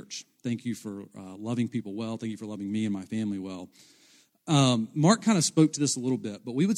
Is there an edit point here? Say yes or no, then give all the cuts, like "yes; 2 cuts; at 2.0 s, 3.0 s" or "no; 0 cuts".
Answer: no; 0 cuts